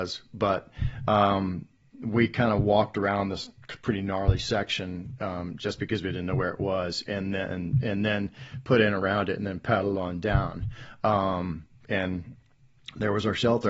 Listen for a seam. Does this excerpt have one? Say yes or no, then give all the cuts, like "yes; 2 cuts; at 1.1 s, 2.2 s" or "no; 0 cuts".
no; 0 cuts